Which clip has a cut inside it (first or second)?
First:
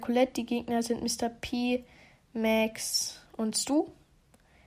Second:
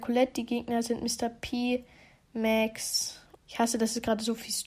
second